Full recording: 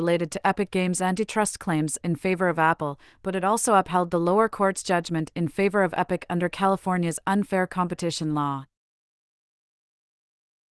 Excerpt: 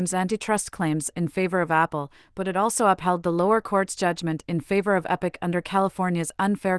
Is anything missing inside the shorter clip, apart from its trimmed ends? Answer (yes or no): no